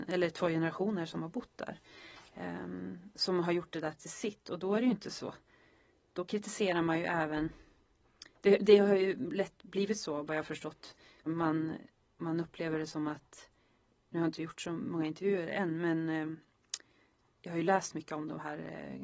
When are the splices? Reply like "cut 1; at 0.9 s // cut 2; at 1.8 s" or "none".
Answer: cut 1; at 11.3 s